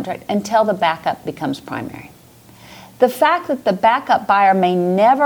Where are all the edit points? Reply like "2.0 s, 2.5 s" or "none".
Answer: 2.9 s